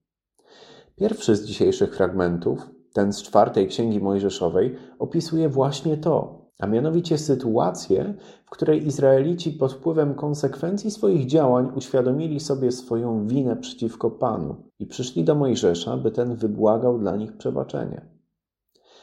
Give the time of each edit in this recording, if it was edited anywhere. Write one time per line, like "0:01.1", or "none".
0:06.5
0:14.7

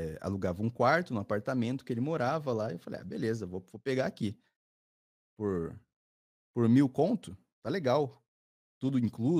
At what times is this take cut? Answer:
none

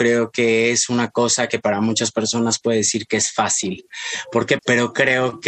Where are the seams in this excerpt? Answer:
0:04.6

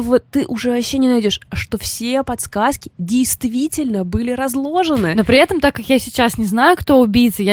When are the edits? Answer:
none

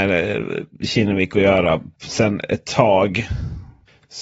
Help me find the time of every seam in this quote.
0:02.0

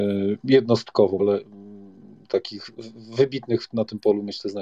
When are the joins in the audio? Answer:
0:01.2

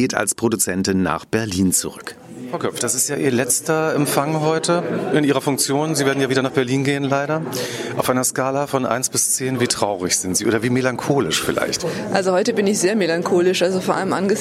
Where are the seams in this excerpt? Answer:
none

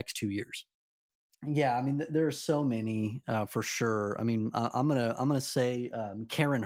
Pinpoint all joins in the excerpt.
0:01.3

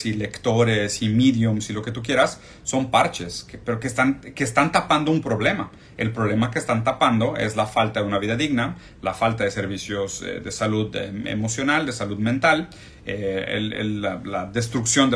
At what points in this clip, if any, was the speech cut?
none

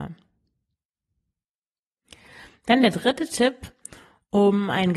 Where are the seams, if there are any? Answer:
none

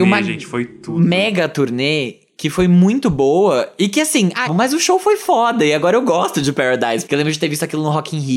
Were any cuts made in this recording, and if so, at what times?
0:04.5
0:07.1

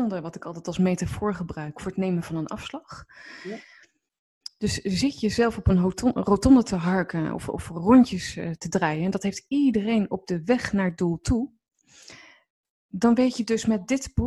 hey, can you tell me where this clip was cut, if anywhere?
none

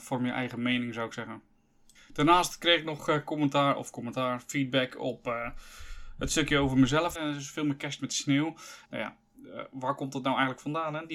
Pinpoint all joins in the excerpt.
0:07.2
0:08.9

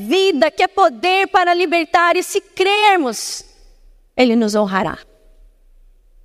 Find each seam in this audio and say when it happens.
none

